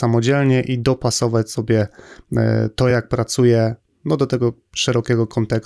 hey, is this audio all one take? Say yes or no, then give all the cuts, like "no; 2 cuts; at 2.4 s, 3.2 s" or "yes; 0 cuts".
yes; 0 cuts